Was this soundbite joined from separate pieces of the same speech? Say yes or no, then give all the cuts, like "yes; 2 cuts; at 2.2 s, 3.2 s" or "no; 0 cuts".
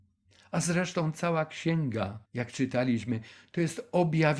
yes; 1 cut; at 2.2 s